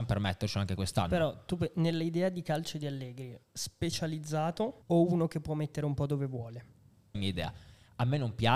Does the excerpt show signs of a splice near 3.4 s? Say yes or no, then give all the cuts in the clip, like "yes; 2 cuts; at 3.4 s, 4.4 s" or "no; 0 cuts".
yes; 3 cuts; at 3.4 s, 4.8 s, 7.1 s